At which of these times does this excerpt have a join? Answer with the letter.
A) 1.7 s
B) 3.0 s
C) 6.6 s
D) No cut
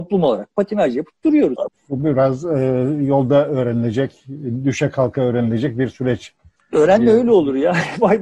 A